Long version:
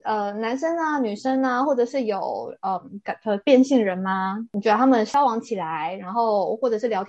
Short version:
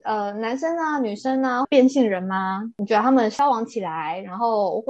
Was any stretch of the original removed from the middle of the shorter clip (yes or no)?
yes